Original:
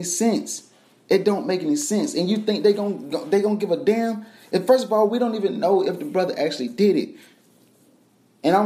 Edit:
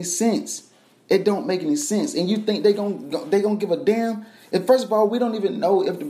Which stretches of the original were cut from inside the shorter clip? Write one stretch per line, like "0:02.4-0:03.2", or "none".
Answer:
none